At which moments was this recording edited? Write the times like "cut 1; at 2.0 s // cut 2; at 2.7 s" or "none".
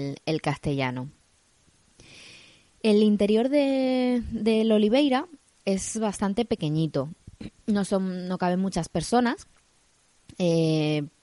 none